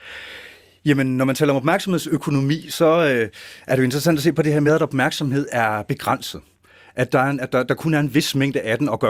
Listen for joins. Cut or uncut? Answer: uncut